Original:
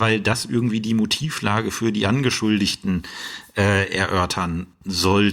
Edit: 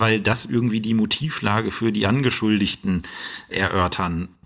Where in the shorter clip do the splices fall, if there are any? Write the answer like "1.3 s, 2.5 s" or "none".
3.5 s